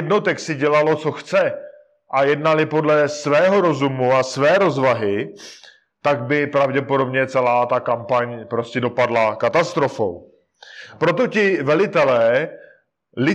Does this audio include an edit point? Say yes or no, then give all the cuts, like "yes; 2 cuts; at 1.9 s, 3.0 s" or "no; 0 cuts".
no; 0 cuts